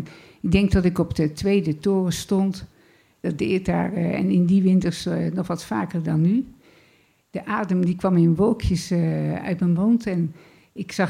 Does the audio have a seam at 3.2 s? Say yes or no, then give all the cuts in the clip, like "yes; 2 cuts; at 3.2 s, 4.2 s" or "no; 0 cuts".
yes; 1 cut; at 3.2 s